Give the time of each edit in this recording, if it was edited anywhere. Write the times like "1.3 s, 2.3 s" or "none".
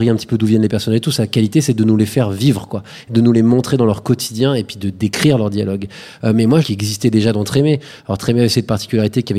6.6 s